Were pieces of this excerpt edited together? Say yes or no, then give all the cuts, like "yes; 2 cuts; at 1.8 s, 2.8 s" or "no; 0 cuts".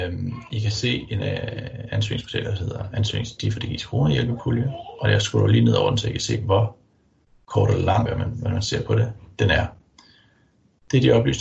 yes; 1 cut; at 8.1 s